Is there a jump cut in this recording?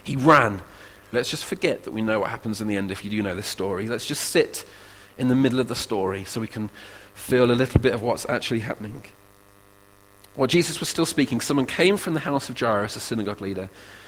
yes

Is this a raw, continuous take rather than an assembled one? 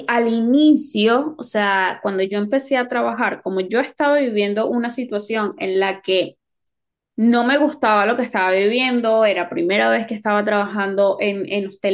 yes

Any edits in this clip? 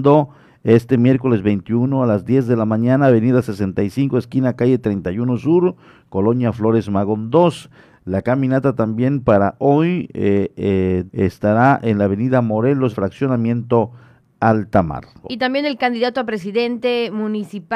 yes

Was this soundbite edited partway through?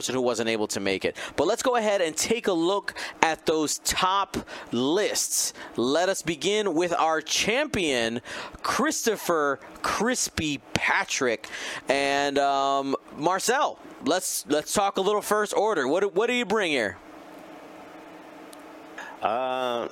no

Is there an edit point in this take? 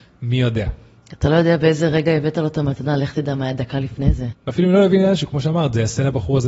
yes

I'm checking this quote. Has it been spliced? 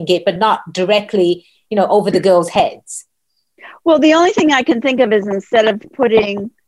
no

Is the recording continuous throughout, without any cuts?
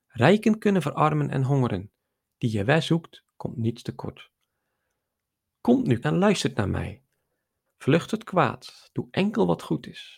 no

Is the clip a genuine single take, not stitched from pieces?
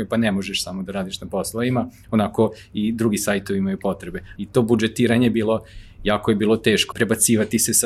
no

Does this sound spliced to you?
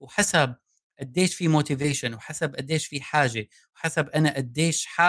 no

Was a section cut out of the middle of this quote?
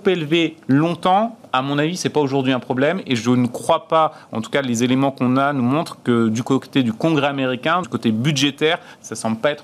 yes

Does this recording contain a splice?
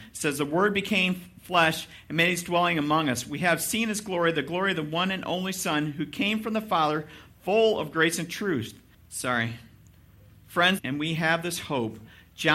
yes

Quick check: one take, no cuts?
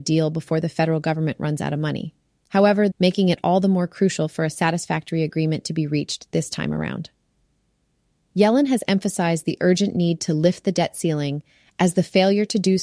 no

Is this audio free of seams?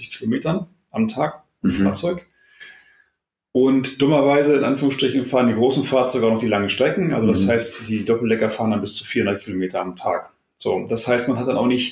yes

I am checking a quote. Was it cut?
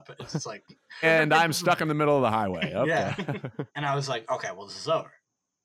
yes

